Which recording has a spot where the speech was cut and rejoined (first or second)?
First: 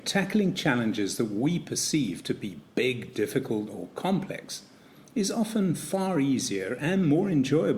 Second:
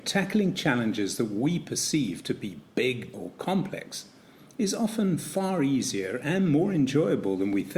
second